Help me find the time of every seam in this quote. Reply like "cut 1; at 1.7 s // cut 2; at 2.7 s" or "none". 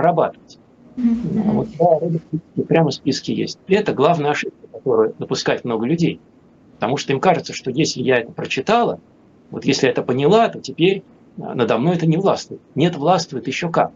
cut 1; at 1.0 s // cut 2; at 3.7 s